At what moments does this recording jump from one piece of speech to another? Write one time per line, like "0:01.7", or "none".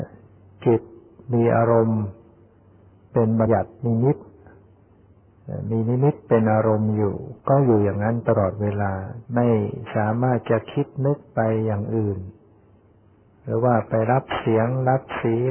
0:03.5
0:07.4
0:09.2